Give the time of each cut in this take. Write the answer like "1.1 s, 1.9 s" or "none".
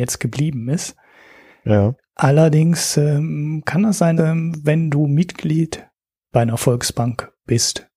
4.2 s

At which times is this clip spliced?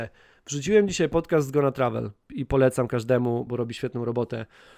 2.3 s, 3.5 s

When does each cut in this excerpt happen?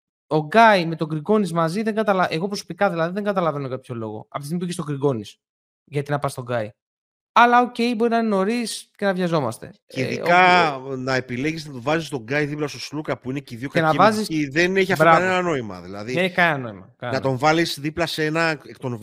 none

